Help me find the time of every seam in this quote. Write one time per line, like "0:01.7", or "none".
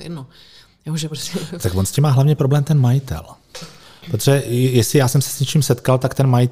none